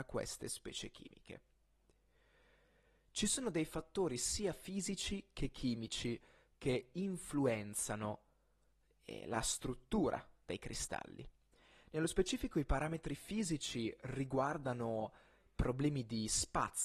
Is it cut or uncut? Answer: uncut